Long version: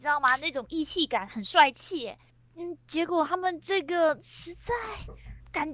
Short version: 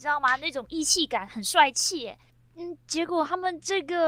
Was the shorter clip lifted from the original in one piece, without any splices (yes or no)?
yes